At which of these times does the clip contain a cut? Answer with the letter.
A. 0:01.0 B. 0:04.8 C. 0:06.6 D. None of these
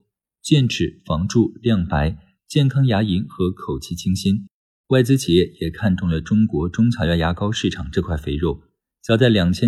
B